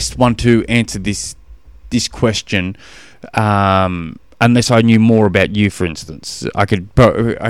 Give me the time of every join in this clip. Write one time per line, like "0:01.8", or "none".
none